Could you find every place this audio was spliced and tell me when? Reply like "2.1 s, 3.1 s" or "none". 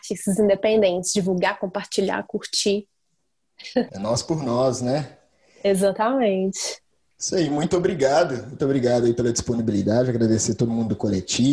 3.9 s